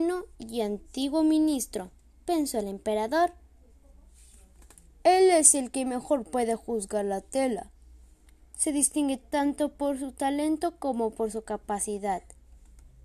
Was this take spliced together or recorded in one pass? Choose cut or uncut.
uncut